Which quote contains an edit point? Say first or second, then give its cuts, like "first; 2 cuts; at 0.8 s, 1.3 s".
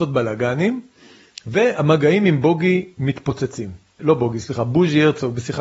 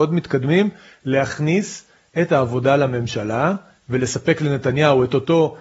first; 1 cut; at 4.0 s